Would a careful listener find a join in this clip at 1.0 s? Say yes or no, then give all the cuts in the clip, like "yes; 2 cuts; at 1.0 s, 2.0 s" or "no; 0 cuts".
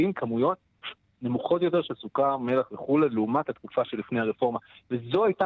no; 0 cuts